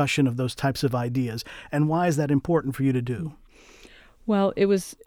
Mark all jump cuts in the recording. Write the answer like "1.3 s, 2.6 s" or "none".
none